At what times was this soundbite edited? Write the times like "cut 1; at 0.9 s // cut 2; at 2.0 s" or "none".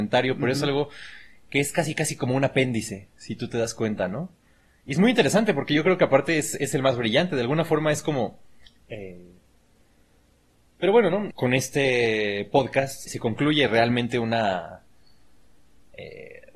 cut 1; at 8.7 s // cut 2; at 11.3 s // cut 3; at 13.1 s

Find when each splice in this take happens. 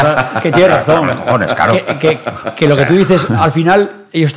none

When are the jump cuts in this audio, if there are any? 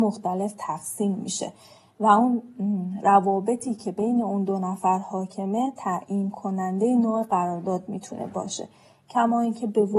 none

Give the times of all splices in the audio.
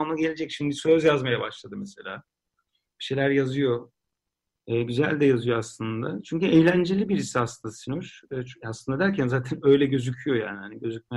none

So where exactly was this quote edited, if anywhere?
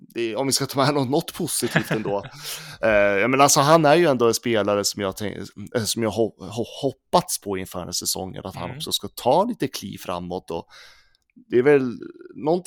none

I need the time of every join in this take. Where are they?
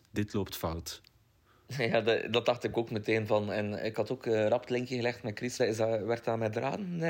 cut 1; at 5.6 s

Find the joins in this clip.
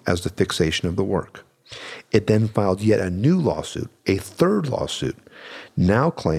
none

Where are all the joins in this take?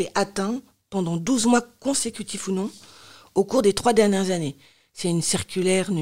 none

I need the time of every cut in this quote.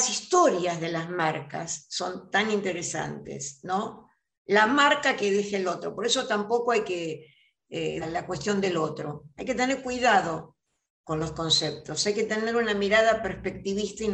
cut 1; at 8.0 s

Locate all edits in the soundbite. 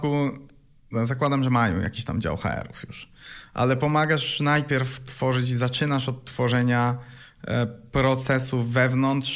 none

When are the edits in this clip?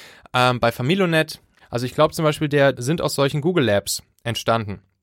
cut 1; at 1.6 s // cut 2; at 2.7 s

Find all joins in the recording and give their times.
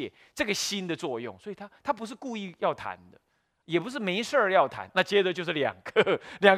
cut 1; at 4.9 s

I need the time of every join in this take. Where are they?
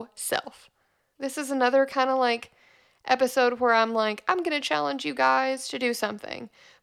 cut 1; at 1.2 s

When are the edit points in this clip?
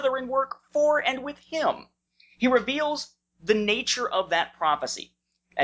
none

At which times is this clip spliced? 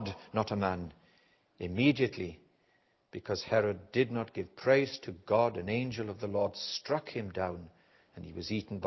none

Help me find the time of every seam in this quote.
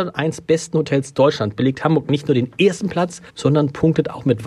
cut 1; at 3.3 s

